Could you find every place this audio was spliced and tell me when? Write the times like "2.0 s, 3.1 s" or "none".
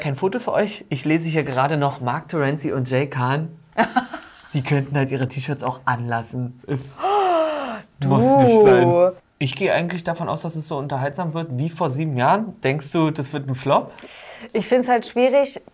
none